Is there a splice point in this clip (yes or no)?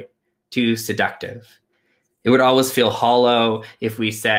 no